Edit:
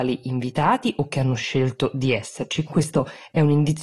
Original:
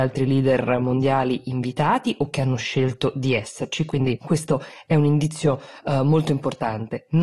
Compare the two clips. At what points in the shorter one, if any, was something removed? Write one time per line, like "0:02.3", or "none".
0:02.6